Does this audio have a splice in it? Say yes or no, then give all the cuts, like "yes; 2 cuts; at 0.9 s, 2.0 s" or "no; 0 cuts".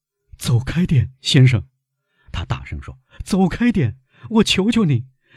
no; 0 cuts